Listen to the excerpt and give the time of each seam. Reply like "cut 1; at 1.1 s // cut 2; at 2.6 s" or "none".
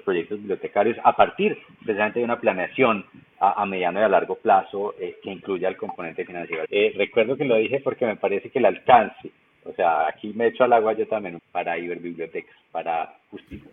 cut 1; at 6.7 s // cut 2; at 11.4 s